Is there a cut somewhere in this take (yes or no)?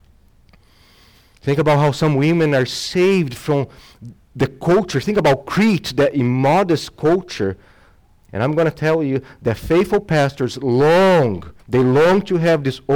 yes